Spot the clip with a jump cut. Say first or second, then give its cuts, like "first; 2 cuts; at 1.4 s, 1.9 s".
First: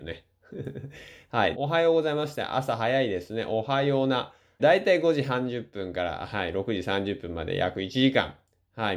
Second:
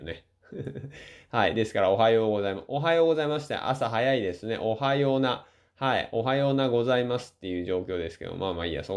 first; 2 cuts; at 1.5 s, 4.6 s